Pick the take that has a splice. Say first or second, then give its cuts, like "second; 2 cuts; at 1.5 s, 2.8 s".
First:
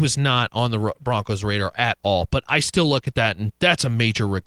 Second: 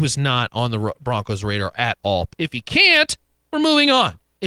second; 1 cut; at 2.3 s